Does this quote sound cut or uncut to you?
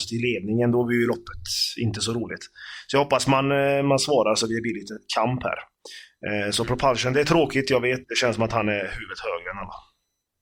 cut